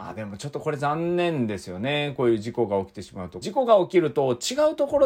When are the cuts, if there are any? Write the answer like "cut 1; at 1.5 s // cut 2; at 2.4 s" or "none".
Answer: cut 1; at 3.4 s